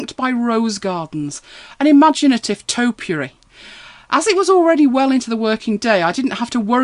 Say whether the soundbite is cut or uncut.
cut